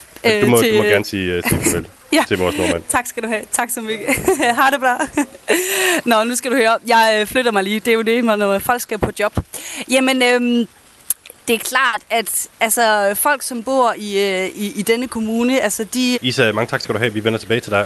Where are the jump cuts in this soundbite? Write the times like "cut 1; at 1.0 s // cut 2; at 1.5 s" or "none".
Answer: cut 1; at 16.1 s